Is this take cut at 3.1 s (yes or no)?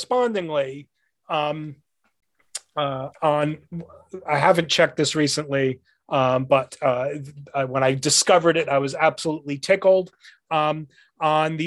yes